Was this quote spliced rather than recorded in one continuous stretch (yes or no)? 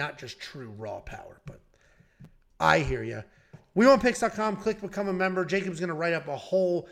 no